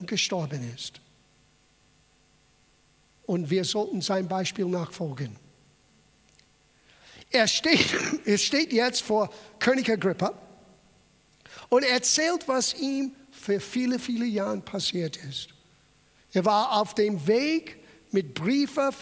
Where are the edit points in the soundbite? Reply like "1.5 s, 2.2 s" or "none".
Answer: none